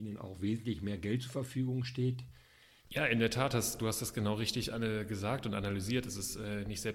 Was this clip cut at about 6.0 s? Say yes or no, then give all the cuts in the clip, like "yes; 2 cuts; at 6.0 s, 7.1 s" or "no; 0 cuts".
no; 1 cut; at 2.8 s